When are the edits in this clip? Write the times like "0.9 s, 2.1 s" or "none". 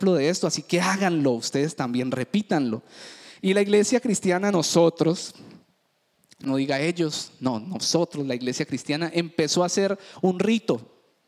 6.5 s